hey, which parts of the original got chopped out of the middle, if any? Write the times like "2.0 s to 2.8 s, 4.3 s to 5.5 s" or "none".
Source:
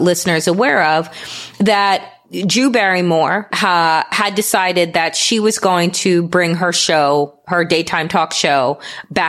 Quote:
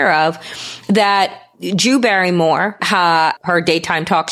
4.1 s to 7.4 s